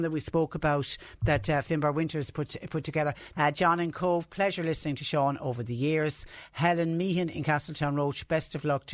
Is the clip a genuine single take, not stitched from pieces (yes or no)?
no